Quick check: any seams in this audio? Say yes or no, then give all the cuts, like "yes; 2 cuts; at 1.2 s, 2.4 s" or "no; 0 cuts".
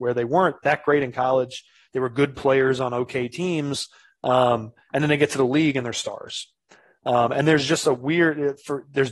no; 0 cuts